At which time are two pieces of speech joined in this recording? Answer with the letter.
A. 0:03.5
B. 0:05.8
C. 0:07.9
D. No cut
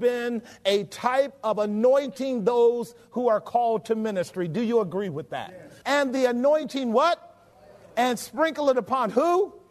B